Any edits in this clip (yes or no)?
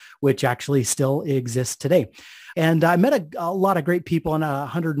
yes